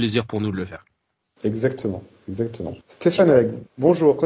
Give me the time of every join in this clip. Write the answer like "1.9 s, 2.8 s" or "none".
2.8 s